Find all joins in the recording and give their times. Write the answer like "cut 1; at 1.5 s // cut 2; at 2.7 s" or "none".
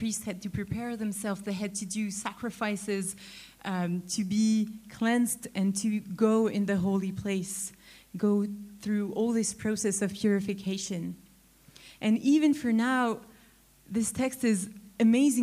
none